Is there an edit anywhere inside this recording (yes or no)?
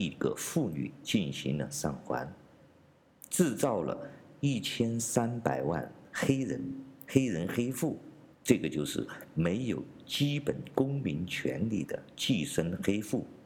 yes